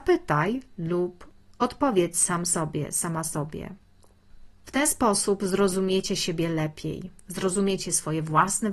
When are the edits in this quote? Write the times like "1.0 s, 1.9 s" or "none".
4.5 s